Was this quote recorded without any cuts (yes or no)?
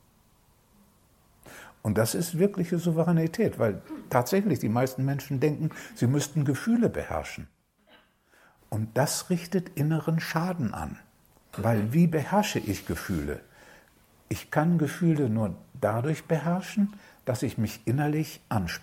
yes